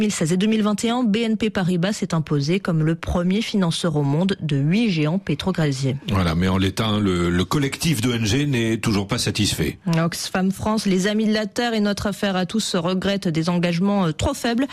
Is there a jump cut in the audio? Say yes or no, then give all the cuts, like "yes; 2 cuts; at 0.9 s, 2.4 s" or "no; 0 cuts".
no; 0 cuts